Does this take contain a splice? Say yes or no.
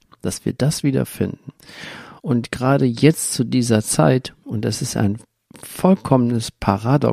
yes